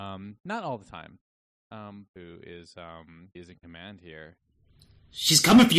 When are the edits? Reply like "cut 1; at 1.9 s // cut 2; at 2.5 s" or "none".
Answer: cut 1; at 2.1 s // cut 2; at 3.4 s